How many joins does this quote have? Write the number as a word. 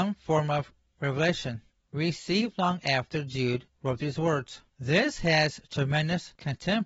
one